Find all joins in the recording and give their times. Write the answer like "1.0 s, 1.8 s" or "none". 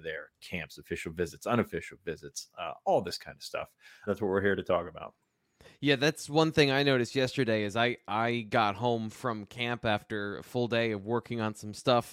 4.1 s